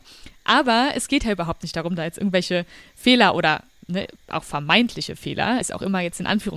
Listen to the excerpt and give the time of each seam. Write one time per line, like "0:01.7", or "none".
0:05.6

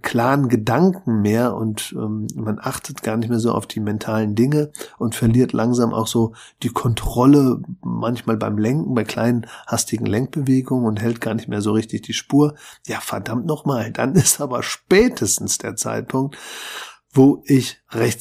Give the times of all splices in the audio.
none

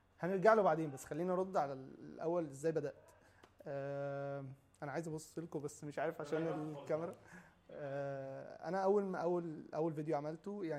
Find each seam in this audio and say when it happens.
none

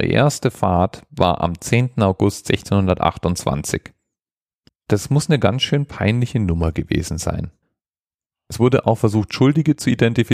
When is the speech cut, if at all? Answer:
0:04.7

